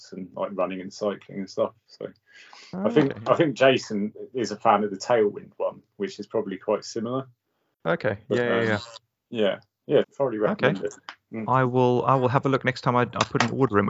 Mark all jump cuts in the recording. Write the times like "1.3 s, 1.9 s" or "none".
10.0 s